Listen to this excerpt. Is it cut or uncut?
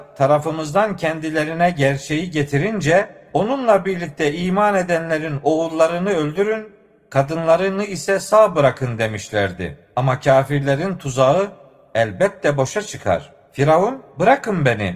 uncut